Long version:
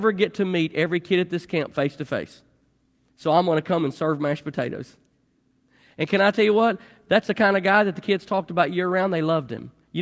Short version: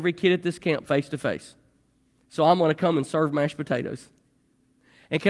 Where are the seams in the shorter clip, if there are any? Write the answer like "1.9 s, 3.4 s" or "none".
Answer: none